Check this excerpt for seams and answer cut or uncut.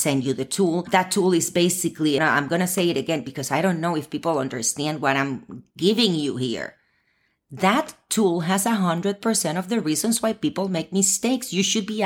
cut